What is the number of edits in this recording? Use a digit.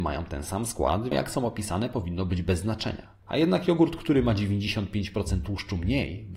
1